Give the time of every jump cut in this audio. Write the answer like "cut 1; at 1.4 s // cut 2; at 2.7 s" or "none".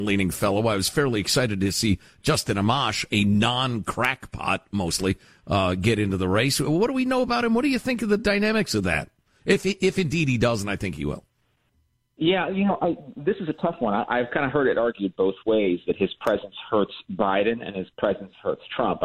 none

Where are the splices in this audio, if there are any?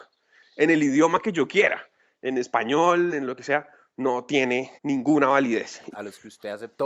cut 1; at 3.1 s // cut 2; at 4.8 s // cut 3; at 5.9 s

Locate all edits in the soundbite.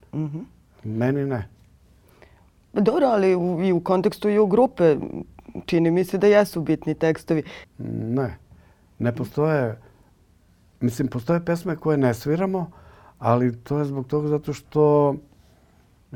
cut 1; at 7.6 s

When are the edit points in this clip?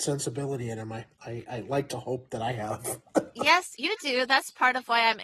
none

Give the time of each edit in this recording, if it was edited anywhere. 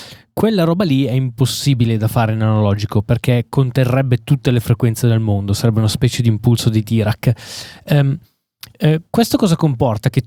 none

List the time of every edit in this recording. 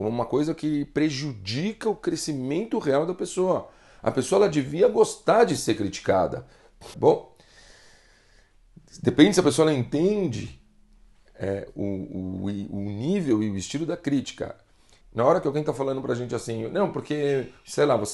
cut 1; at 6.9 s // cut 2; at 15.0 s

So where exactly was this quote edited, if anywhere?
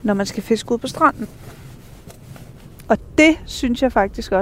cut 1; at 2.8 s

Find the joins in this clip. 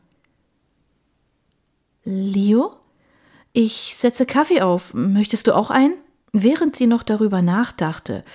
cut 1; at 6.3 s

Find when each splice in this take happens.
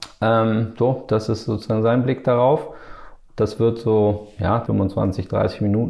cut 1; at 3.3 s // cut 2; at 4.7 s

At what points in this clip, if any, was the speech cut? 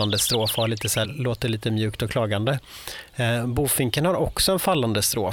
cut 1; at 1.0 s

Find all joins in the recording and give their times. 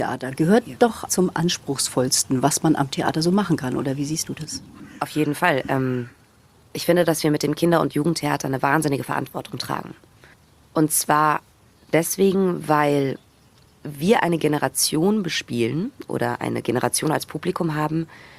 cut 1; at 1.1 s

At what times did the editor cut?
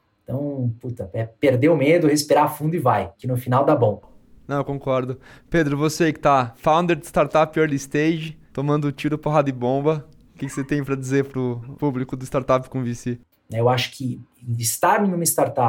cut 1; at 13.3 s

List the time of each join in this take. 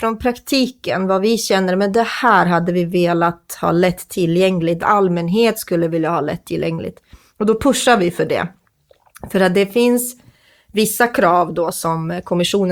cut 1; at 4.8 s

